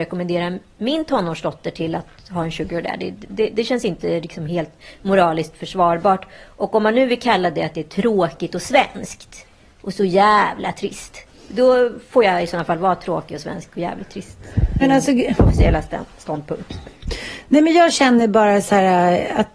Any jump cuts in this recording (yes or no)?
yes